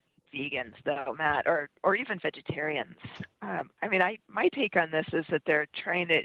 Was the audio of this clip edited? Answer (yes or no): no